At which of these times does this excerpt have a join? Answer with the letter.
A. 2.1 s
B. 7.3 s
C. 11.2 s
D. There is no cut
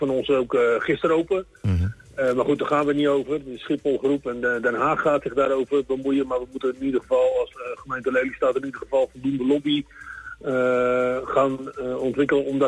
D